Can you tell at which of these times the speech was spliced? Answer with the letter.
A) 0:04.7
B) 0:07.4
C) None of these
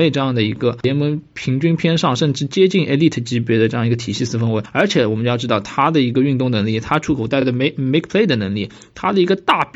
C